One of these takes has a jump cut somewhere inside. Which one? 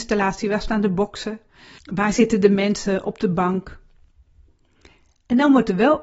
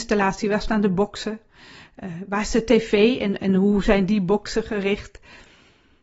first; 1 cut; at 1.8 s

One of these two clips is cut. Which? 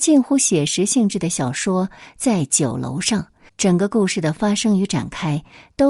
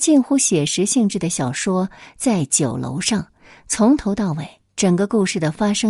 first; 1 cut; at 3.5 s

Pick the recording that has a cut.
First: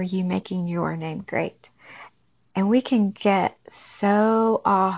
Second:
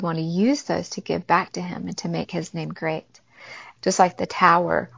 second; 1 cut; at 3.8 s

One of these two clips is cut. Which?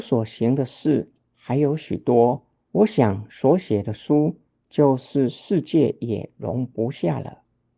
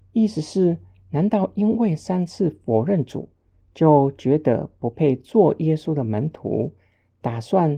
first; 1 cut; at 2.6 s

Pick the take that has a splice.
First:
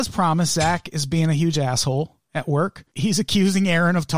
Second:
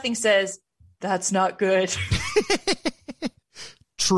first; 1 cut; at 2.9 s

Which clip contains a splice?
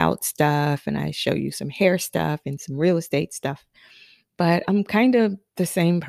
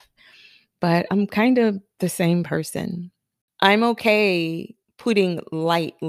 second; 1 cut; at 4.8 s

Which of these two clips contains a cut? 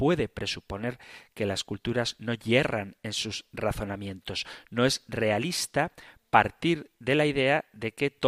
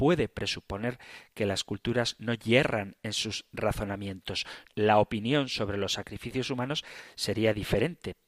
second; 1 cut; at 4.7 s

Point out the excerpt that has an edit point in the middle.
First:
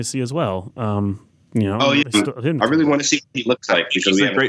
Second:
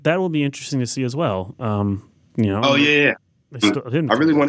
first; 1 cut; at 2.0 s

